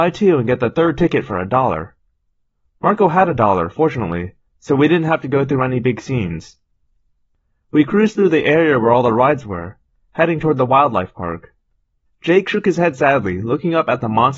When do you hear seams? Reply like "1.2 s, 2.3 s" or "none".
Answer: none